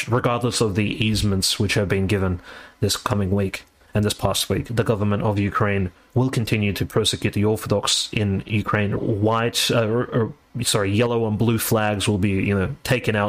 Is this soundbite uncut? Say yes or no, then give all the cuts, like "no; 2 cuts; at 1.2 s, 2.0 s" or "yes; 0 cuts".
no; 2 cuts; at 4.7 s, 9.0 s